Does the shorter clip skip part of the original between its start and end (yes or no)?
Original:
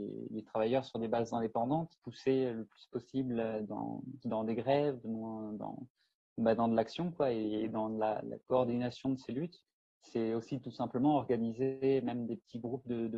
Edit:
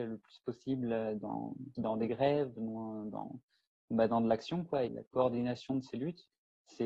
yes